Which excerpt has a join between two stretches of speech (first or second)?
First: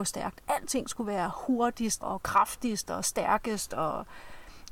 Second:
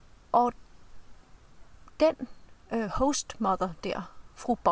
first